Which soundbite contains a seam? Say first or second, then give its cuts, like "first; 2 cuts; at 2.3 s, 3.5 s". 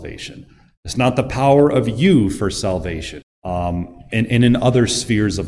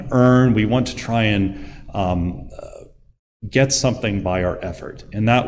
first; 1 cut; at 3.2 s